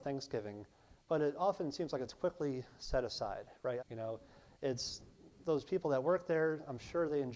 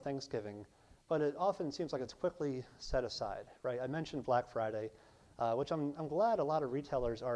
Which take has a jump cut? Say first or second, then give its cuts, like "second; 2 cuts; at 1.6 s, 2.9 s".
first; 1 cut; at 3.8 s